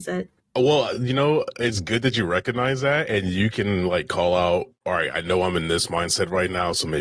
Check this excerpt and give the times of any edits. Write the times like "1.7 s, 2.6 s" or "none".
none